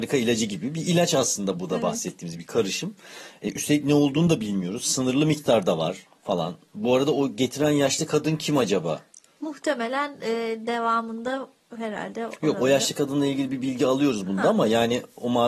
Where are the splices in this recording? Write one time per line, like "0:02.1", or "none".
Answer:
none